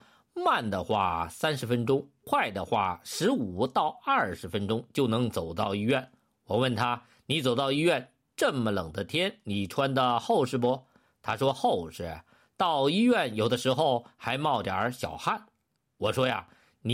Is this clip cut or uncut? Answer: uncut